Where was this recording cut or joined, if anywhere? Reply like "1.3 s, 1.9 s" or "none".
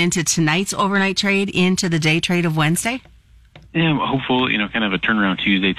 3.7 s